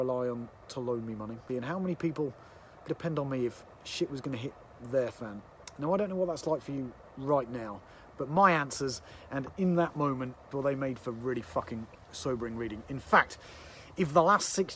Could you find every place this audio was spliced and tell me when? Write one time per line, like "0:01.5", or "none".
0:01.5
0:02.9
0:10.5